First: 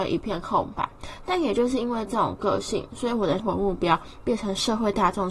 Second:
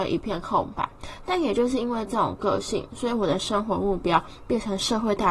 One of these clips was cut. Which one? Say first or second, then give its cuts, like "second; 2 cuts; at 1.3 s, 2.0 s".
first; 1 cut; at 3.4 s